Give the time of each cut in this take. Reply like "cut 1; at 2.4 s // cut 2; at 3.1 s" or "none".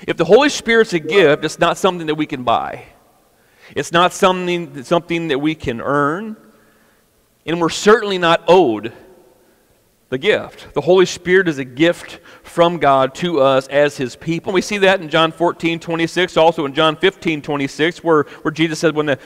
cut 1; at 14.5 s